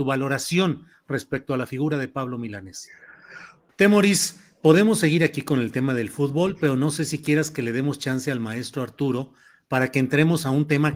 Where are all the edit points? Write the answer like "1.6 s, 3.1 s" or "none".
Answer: 3.7 s